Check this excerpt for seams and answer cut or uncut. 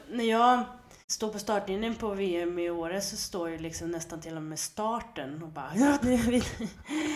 cut